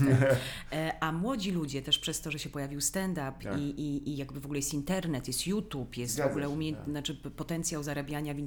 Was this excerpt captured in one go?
yes; 0 cuts

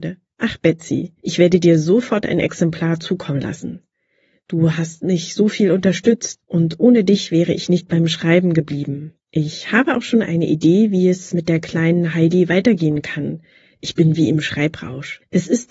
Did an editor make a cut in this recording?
no; 0 cuts

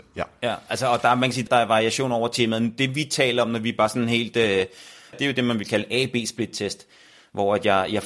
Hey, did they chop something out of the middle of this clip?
yes; 2 cuts; at 1.5 s, 5.1 s

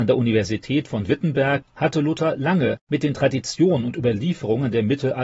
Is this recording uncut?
yes; 0 cuts

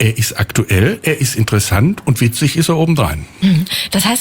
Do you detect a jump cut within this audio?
no; 0 cuts

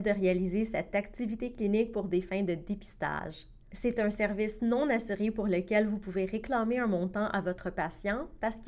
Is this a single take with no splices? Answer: no; 1 cut; at 3.6 s

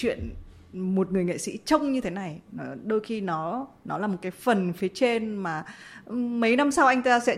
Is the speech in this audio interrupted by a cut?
no; 0 cuts

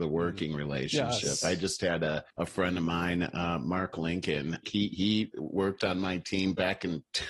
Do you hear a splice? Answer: yes; 2 cuts; at 2.3 s, 4.6 s

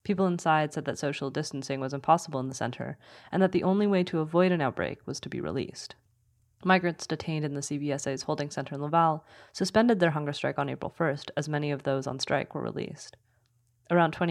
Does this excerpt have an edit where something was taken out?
no; 0 cuts

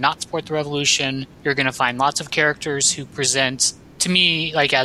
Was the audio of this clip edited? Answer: no; 0 cuts

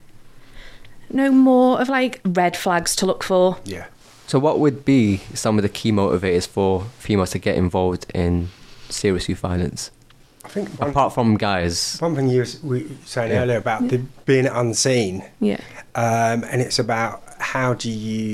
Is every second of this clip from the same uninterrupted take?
yes; 0 cuts

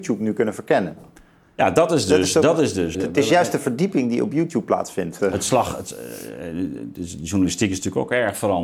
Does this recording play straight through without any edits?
no; 2 cuts; at 2.9 s, 5.2 s

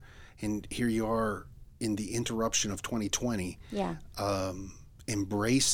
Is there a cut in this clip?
no; 0 cuts

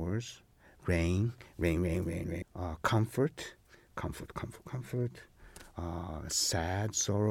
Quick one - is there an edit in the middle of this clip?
yes; 1 cut; at 2.4 s

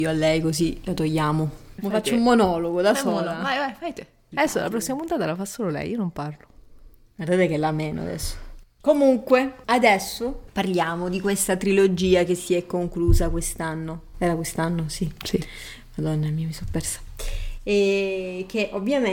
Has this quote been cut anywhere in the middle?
no; 0 cuts

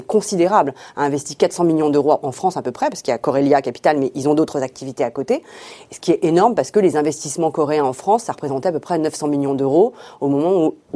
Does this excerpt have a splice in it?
no; 0 cuts

